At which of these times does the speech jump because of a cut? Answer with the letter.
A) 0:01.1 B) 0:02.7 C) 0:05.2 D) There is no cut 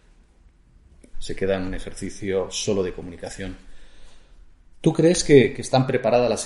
A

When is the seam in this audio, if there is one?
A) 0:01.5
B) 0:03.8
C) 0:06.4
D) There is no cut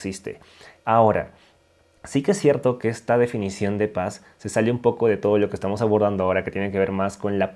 D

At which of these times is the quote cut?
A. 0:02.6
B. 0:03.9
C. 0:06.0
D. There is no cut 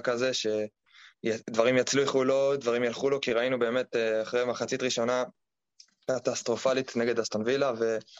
D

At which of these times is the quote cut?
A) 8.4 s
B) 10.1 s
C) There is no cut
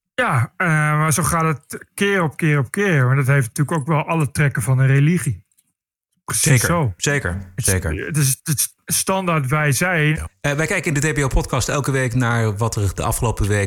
B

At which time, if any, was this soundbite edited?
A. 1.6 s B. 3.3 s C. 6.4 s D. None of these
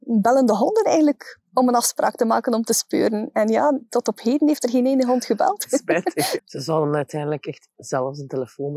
C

